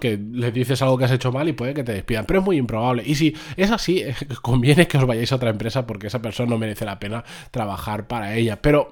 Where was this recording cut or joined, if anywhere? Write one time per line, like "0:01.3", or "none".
none